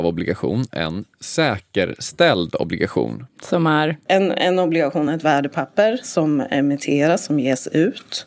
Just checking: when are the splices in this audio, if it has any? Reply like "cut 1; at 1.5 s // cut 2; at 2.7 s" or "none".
none

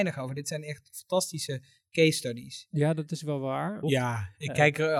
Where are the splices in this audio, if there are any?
cut 1; at 3.8 s

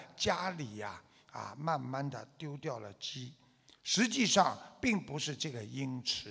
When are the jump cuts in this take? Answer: none

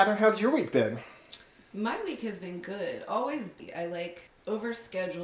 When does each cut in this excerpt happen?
none

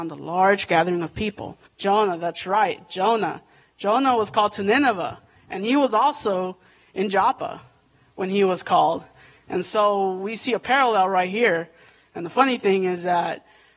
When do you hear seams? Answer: cut 1; at 1.7 s

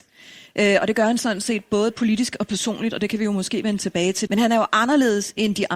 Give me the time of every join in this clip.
cut 1; at 4.3 s

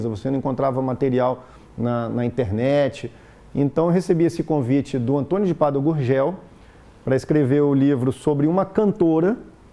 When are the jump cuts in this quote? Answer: none

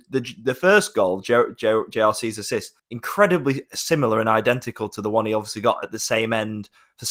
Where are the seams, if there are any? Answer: cut 1; at 2.8 s

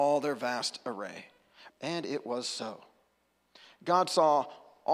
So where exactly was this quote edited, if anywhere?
cut 1; at 1.7 s

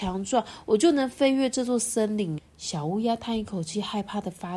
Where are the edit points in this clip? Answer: cut 1; at 2.4 s

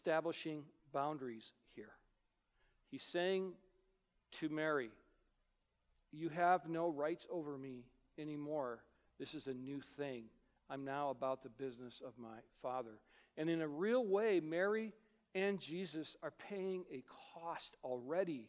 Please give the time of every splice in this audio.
none

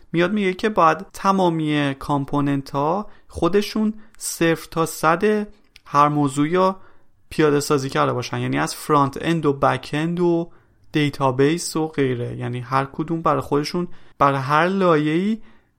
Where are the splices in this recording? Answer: cut 1; at 1.1 s // cut 2; at 14.1 s

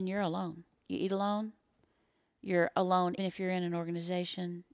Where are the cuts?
cut 1; at 3.2 s

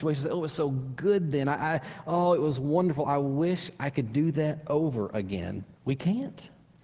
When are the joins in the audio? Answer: cut 1; at 5.7 s

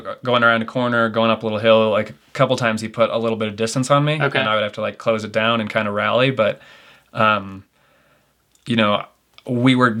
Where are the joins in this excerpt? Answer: none

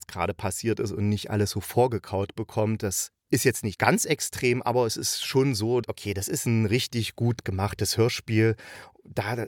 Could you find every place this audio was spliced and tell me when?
cut 1; at 3.7 s // cut 2; at 5.8 s

